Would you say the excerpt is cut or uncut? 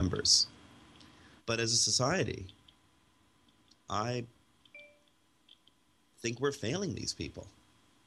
cut